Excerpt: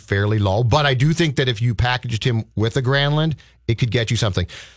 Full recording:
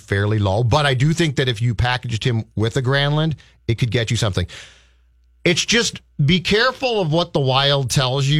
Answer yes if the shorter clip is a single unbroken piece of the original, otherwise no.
yes